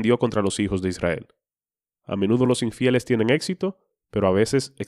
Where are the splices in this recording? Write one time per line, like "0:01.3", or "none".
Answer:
0:01.9